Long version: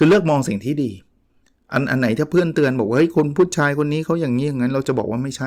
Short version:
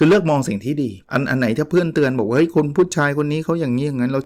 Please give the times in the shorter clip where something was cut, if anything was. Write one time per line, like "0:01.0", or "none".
0:01.0